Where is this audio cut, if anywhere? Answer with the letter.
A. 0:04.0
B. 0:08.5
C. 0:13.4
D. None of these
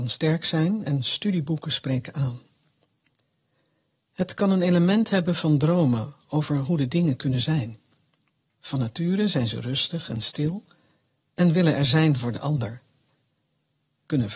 B